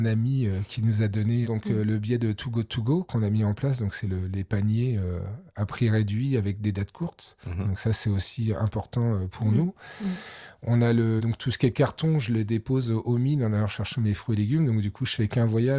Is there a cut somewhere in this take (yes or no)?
yes